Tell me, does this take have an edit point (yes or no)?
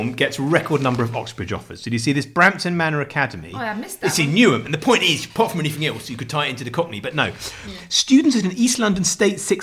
no